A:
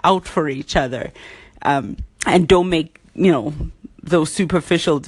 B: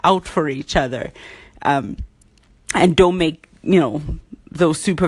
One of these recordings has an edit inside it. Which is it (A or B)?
A